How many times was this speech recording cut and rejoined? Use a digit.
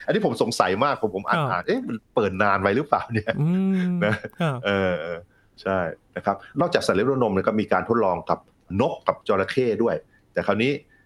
0